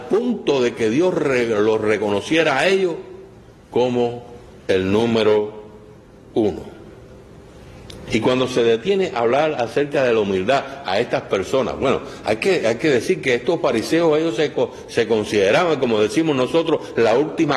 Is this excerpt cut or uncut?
cut